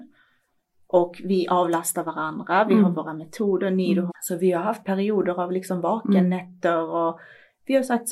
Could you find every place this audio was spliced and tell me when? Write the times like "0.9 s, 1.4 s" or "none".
4.1 s